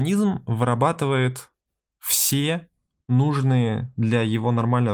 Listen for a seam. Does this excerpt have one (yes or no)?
no